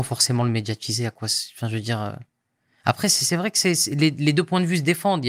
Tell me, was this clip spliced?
no; 0 cuts

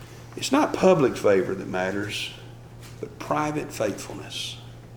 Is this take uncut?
yes; 0 cuts

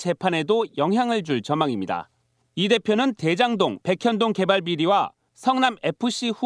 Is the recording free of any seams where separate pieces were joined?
no; 1 cut; at 3.8 s

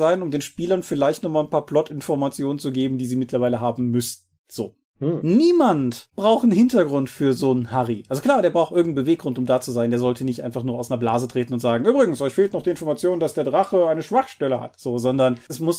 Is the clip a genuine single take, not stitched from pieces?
yes; 0 cuts

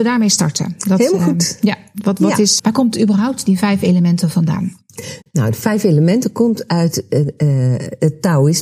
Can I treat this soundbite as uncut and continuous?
no; 1 cut; at 2.6 s

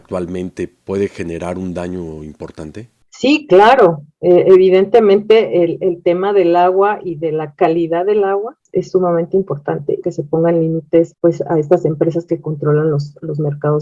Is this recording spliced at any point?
yes; 1 cut; at 10.0 s

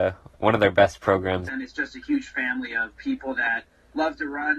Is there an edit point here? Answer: yes; 1 cut; at 1.5 s

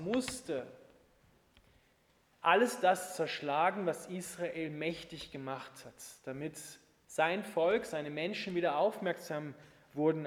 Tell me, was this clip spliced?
no; 0 cuts

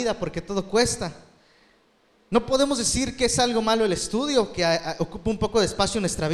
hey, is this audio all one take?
yes; 0 cuts

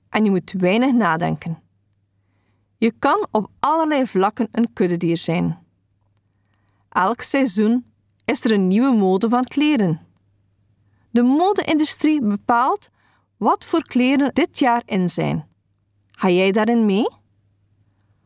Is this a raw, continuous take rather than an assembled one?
no; 2 cuts; at 14.3 s, 15.9 s

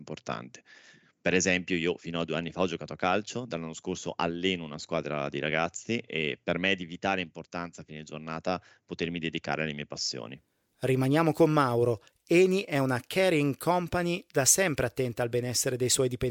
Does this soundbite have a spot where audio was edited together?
no; 0 cuts

